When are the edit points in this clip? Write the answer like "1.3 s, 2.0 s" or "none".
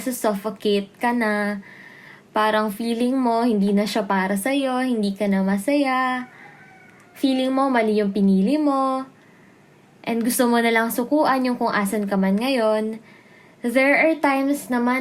none